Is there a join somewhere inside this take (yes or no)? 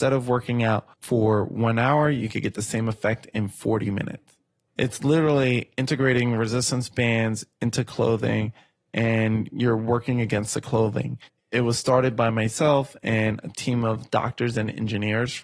yes